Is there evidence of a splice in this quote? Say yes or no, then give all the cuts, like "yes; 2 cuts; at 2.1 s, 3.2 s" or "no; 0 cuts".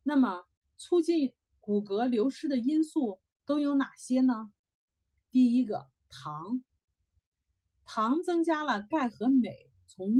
no; 0 cuts